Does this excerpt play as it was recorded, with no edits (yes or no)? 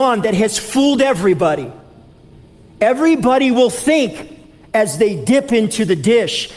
yes